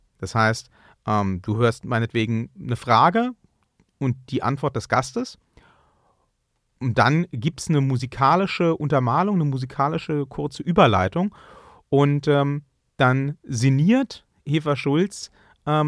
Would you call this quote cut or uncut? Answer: uncut